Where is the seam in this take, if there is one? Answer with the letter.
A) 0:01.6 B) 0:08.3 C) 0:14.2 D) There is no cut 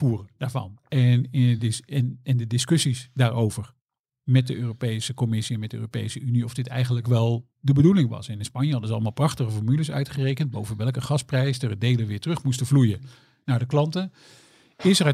D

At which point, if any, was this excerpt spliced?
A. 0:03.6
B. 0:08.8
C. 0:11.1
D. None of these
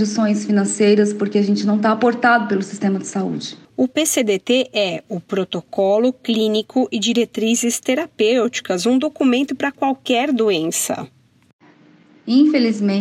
A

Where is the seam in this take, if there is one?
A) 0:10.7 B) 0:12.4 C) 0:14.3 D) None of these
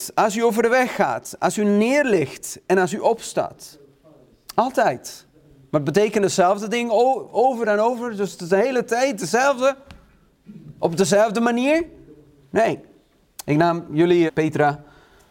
C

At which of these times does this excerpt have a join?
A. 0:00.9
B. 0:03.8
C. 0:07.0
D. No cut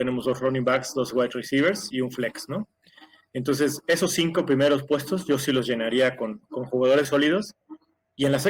C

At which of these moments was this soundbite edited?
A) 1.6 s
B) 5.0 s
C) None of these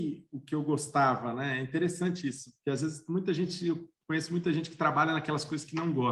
C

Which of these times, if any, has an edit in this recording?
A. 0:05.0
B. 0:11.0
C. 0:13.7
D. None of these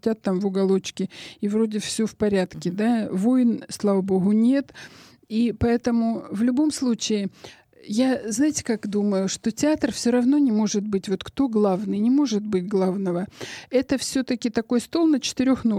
D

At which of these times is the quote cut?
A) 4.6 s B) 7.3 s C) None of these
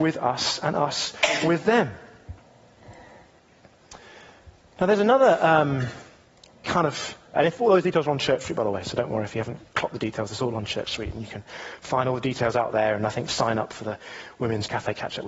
B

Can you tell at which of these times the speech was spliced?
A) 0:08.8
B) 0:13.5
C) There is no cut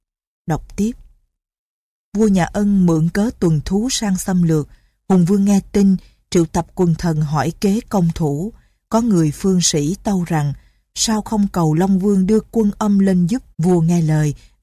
B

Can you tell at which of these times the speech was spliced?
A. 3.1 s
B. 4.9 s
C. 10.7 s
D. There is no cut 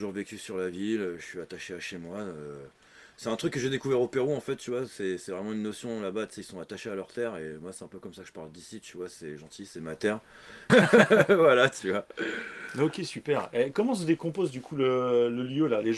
C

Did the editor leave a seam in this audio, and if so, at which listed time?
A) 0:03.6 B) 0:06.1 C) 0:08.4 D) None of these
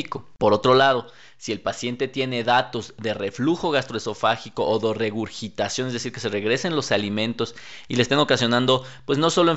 D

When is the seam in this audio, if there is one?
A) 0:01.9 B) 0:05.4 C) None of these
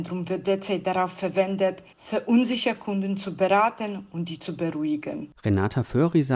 A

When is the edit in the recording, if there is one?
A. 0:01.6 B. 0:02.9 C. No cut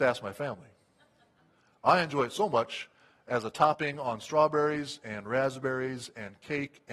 C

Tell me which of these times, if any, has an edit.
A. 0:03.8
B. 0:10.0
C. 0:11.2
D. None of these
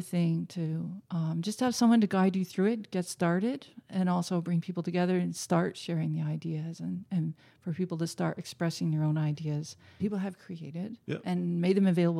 B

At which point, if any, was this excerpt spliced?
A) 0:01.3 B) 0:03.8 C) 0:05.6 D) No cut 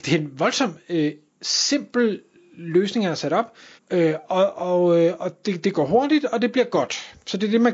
B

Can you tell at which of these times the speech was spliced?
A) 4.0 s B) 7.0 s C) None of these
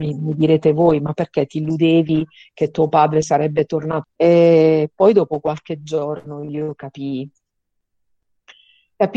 A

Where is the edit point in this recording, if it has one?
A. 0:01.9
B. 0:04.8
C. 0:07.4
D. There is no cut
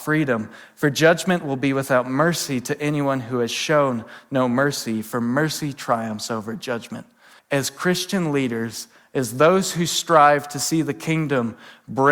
C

